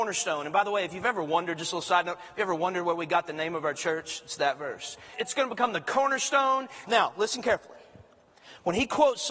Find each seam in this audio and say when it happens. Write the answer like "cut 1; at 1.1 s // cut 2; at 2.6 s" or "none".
cut 1; at 5.1 s // cut 2; at 6.9 s